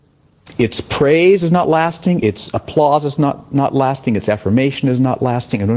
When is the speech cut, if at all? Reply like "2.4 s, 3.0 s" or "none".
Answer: none